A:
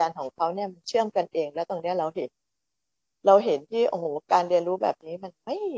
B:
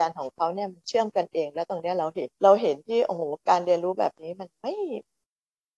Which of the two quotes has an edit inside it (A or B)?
B